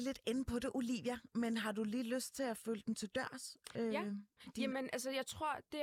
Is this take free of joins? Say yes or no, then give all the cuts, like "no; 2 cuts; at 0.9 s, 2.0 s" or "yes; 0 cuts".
yes; 0 cuts